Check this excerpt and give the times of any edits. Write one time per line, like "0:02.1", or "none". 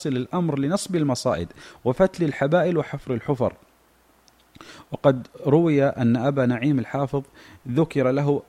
none